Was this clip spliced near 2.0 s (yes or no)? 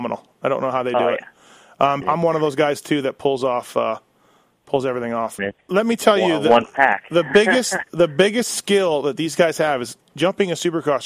yes